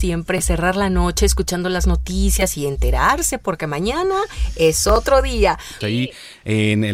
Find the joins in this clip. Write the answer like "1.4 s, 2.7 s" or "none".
5.8 s